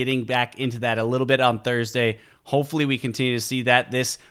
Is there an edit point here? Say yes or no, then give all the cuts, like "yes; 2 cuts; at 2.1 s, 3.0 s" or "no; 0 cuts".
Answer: no; 0 cuts